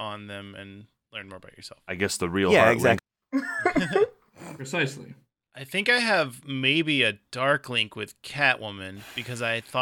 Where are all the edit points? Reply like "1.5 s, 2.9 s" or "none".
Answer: 3.0 s